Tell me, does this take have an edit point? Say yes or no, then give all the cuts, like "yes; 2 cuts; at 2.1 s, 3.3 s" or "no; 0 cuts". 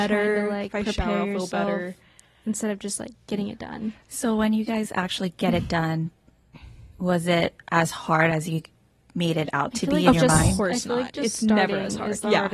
no; 0 cuts